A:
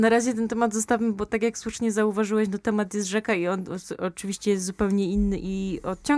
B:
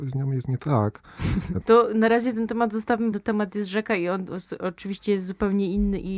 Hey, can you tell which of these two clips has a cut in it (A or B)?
B